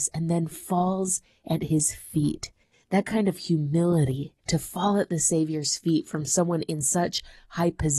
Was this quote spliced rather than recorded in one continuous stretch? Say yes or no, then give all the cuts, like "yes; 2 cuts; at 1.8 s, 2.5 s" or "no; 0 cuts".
yes; 2 cuts; at 2.7 s, 4.4 s